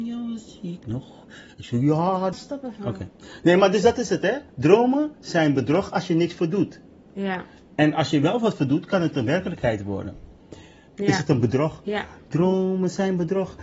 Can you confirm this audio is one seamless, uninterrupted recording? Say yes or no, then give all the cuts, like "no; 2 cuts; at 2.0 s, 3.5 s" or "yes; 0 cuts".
no; 2 cuts; at 2.3 s, 10.9 s